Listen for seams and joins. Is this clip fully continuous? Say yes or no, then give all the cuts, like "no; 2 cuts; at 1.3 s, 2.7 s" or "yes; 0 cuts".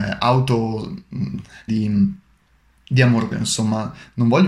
no; 2 cuts; at 1.7 s, 3.3 s